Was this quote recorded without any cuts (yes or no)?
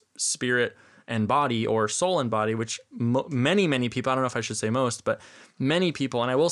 yes